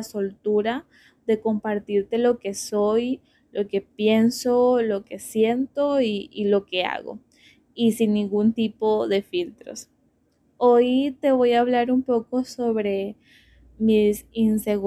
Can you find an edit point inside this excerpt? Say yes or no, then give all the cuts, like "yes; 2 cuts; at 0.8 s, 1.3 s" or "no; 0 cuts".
no; 0 cuts